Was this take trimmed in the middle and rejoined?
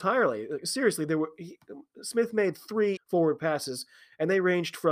yes; 1 cut; at 3.0 s

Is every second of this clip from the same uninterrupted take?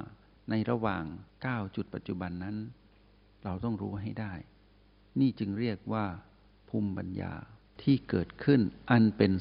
yes; 0 cuts

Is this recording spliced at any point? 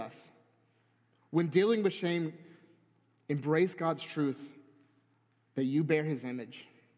no; 0 cuts

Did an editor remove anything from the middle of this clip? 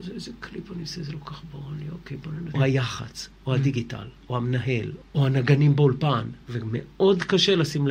yes; 3 cuts; at 2.5 s, 5.0 s, 6.4 s

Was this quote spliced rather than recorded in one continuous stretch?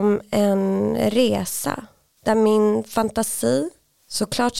no; 0 cuts

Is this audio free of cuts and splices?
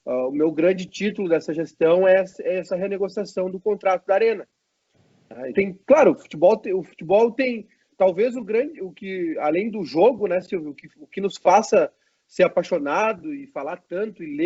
no; 1 cut; at 5.5 s

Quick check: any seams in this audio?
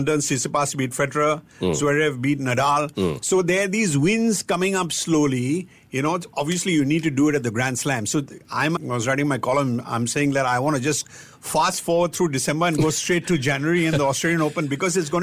yes; 1 cut; at 8.8 s

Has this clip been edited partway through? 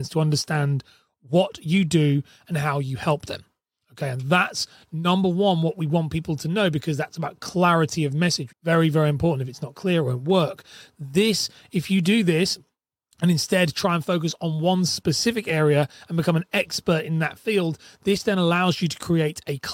yes; 1 cut; at 8.5 s

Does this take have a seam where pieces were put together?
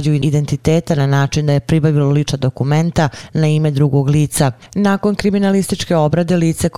yes; 1 cut; at 4.6 s

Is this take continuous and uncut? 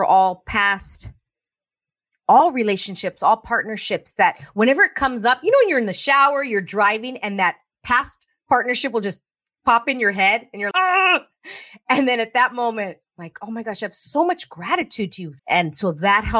no; 2 cuts; at 10.7 s, 15.4 s

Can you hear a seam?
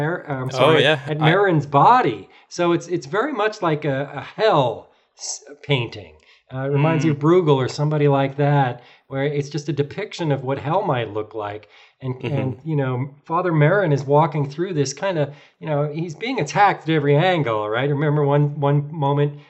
no; 0 cuts

